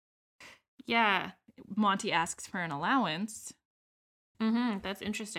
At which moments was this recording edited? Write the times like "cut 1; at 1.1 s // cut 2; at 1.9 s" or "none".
cut 1; at 4.3 s